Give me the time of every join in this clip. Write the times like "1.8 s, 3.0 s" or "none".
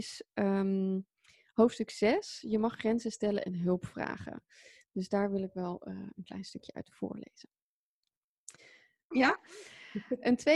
9.1 s